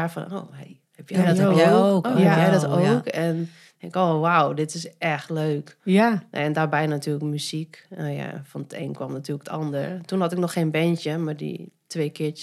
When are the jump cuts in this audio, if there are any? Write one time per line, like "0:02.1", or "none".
none